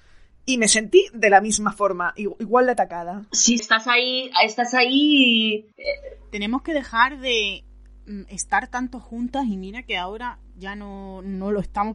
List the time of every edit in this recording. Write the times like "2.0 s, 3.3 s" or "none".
3.6 s, 5.7 s